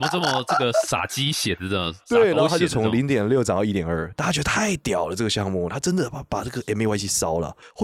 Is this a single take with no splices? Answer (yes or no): yes